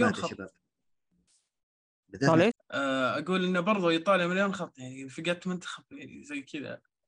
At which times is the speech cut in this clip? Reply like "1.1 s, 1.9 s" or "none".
2.5 s